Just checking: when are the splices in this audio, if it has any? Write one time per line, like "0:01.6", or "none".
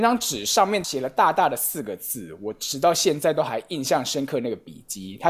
none